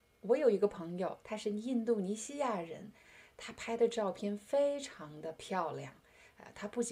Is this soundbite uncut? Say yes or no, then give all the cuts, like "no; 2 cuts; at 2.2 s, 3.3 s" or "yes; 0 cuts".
no; 1 cut; at 1.2 s